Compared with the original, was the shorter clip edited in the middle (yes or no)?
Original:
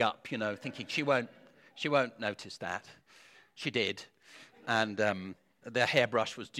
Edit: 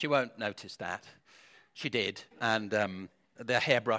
yes